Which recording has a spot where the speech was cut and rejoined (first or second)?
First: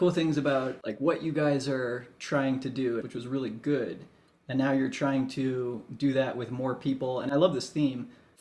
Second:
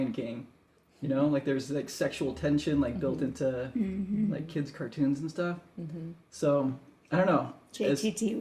first